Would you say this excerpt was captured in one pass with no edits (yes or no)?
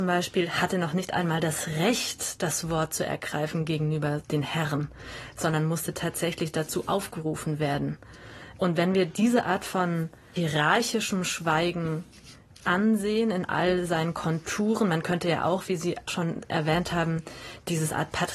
yes